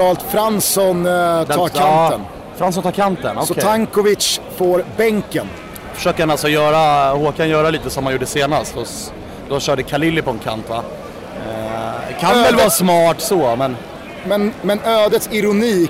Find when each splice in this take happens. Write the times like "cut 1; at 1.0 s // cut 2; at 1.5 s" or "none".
none